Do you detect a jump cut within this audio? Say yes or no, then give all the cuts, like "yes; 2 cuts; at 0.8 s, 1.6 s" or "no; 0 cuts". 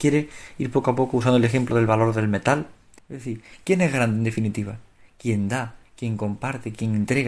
yes; 1 cut; at 3.0 s